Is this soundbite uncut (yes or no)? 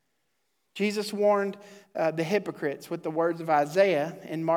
yes